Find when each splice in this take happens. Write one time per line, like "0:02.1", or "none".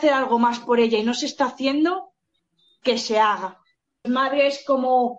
0:04.0